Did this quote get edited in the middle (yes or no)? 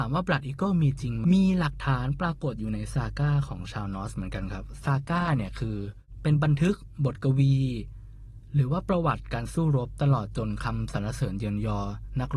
yes